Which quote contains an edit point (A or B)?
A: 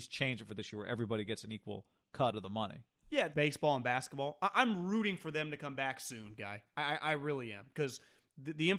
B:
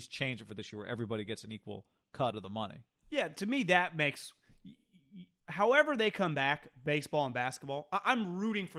A